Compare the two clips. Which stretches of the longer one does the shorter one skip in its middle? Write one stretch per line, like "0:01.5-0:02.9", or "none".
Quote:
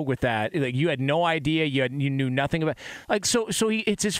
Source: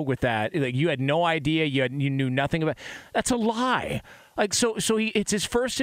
0:03.0-0:04.3